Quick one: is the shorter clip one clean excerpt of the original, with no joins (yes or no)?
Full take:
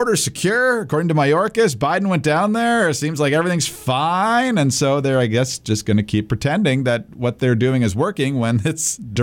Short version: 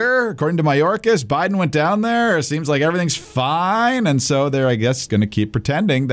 no